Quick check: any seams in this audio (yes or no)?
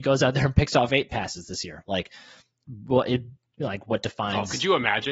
no